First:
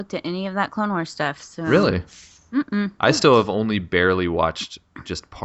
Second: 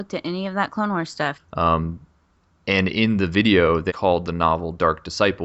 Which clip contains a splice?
second; 2 cuts; at 1.3 s, 3.9 s

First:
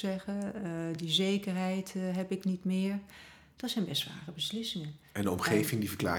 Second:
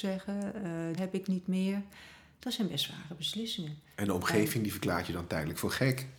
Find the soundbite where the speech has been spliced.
second; 1 cut; at 1.0 s

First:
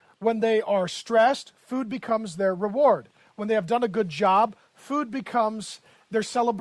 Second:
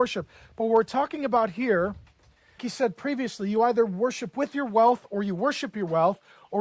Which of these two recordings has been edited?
second; 1 cut; at 2.6 s

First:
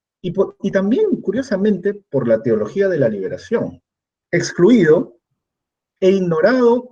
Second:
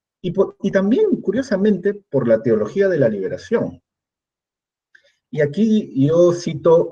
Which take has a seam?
first; 1 cut; at 4.2 s

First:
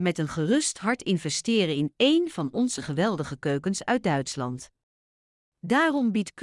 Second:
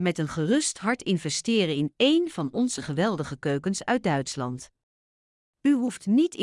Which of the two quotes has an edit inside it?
first; 1 cut; at 5.4 s

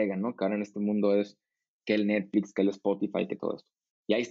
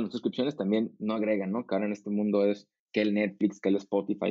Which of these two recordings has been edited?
second; 1 cut; at 2.8 s

